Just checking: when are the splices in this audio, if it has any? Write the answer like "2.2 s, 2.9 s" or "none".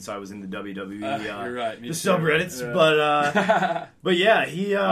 none